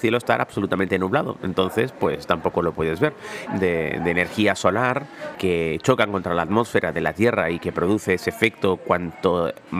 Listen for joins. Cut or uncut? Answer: cut